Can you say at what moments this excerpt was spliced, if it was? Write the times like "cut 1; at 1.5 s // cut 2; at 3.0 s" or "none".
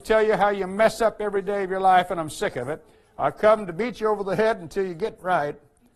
none

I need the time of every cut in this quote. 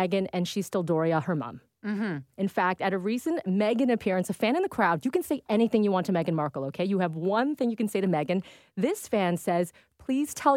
cut 1; at 2.3 s

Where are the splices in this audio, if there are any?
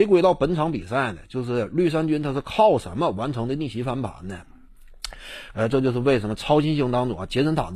cut 1; at 5.5 s

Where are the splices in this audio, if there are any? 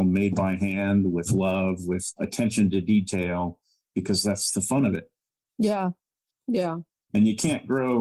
cut 1; at 6.3 s

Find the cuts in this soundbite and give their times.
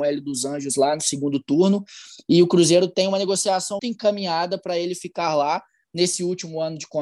cut 1; at 3.8 s

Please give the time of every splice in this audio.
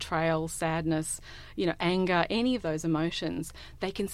none

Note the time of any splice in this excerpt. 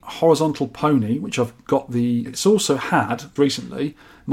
cut 1; at 2.3 s // cut 2; at 3.4 s

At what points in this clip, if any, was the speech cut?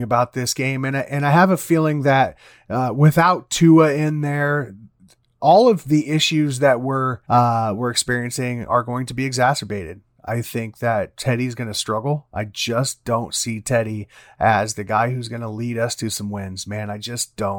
cut 1; at 7.2 s

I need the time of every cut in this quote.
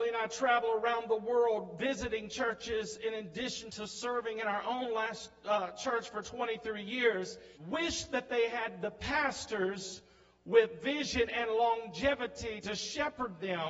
cut 1; at 7.5 s

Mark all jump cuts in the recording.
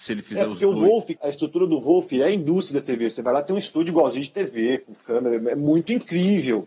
cut 1; at 1.2 s

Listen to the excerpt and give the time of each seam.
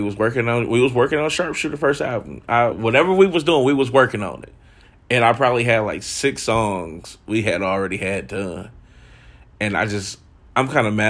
cut 1; at 2.7 s

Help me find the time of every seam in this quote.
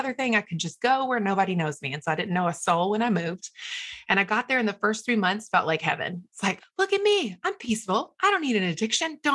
cut 1; at 6.6 s

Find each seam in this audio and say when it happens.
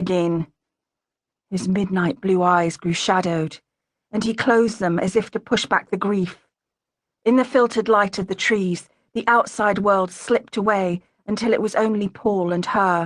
none

